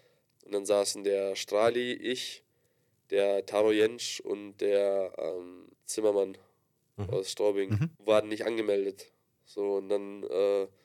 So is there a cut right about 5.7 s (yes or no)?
yes